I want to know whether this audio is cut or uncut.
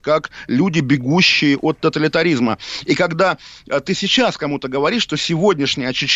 uncut